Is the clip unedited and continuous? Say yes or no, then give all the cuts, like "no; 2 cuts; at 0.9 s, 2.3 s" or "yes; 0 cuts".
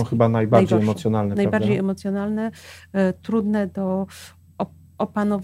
yes; 0 cuts